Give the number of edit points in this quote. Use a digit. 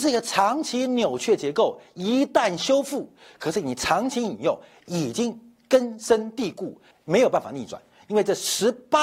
2